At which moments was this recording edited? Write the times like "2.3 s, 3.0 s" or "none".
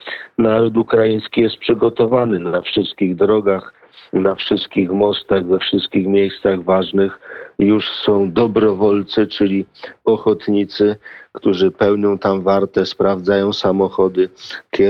none